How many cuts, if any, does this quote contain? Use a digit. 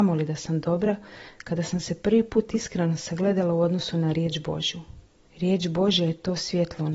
1